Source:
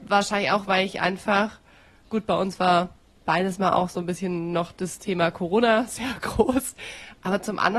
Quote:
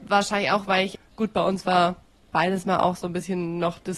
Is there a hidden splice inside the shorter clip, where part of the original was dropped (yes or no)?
yes